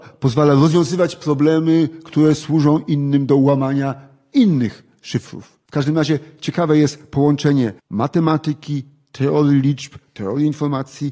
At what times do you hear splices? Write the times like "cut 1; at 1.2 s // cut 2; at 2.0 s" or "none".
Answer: cut 1; at 5.7 s // cut 2; at 7.8 s